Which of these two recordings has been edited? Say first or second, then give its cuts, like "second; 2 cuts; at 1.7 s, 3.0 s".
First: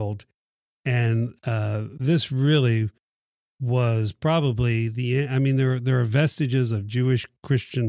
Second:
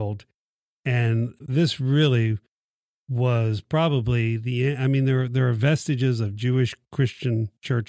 second; 1 cut; at 1.4 s